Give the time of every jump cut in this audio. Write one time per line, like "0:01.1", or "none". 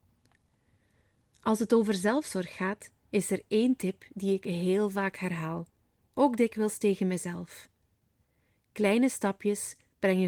none